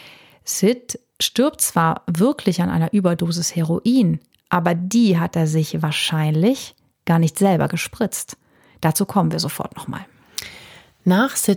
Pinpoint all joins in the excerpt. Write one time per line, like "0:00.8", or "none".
none